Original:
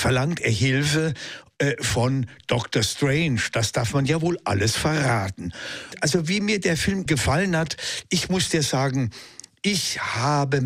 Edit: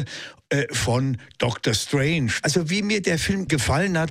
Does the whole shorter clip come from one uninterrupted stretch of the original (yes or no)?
no